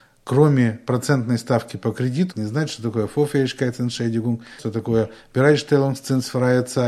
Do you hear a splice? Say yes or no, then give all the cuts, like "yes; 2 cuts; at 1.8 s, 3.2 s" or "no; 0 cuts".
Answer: yes; 2 cuts; at 2.3 s, 4.6 s